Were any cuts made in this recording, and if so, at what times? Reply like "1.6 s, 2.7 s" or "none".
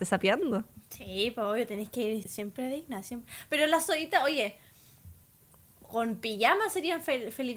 2.2 s